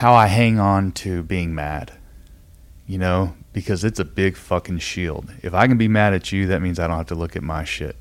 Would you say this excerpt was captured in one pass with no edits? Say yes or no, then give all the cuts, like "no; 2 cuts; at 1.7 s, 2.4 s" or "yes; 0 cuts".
yes; 0 cuts